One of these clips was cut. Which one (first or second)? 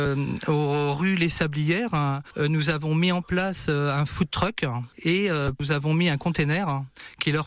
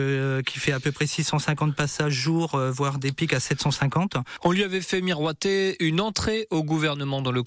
second